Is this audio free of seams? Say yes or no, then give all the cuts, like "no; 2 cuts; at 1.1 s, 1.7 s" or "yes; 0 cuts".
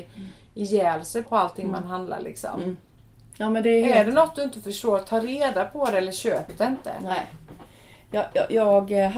no; 1 cut; at 1.3 s